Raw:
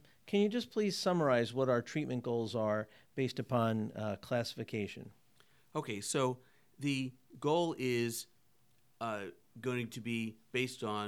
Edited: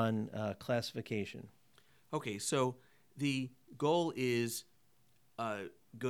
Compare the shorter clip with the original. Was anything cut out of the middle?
no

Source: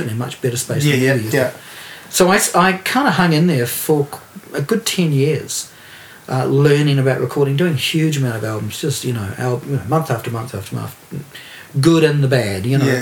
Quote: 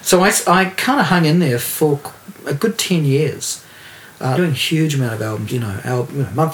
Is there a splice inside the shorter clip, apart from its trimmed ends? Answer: yes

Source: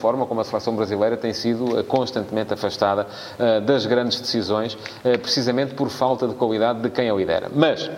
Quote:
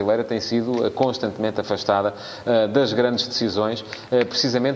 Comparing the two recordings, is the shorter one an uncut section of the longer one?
yes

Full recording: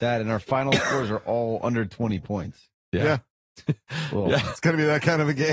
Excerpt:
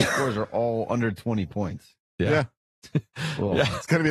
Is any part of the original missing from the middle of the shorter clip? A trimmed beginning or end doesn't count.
no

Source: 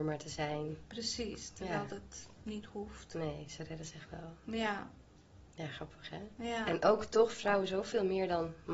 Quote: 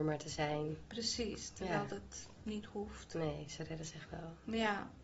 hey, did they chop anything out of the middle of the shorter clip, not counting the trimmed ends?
no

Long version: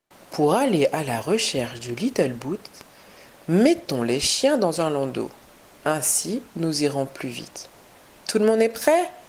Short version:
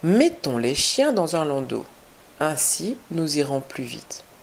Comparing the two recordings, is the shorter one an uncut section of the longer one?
yes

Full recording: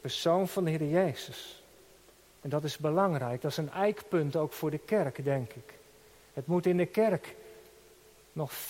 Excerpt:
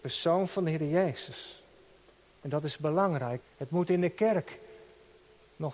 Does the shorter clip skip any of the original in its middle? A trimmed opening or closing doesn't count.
yes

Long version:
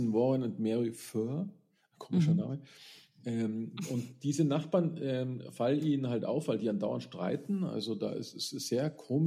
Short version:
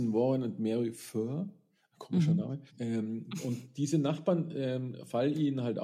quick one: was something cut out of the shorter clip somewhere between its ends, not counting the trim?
yes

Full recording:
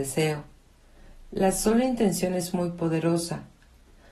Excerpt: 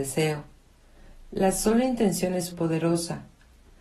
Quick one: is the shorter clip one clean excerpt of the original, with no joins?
no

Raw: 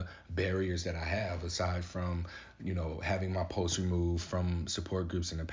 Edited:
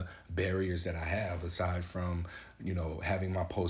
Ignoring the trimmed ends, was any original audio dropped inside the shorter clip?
no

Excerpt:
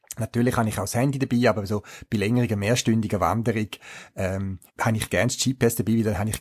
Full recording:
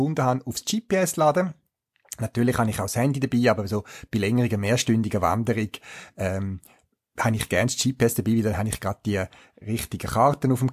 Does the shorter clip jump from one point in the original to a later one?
yes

